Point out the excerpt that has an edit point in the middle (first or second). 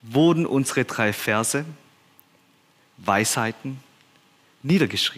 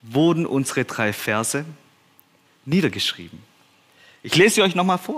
second